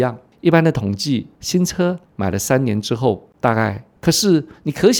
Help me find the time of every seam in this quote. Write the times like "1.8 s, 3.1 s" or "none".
4.0 s